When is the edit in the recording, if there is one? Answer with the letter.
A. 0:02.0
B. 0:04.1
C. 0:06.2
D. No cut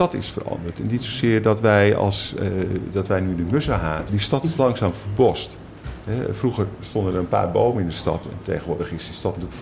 B